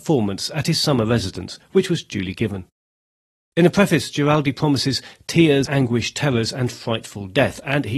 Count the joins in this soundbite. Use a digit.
2